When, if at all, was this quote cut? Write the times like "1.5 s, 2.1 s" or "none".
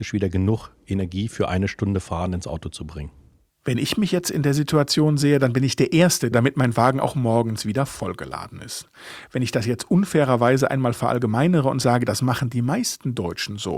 6.3 s